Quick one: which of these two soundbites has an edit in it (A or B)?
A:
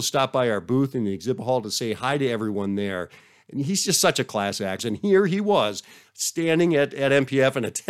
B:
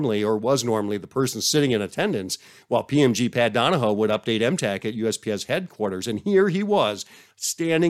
A